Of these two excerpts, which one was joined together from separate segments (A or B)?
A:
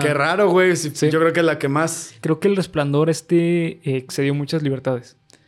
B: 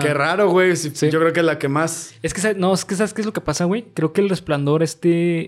A